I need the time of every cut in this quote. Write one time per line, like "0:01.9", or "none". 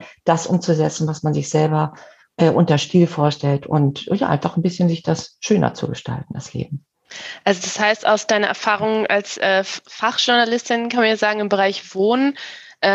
none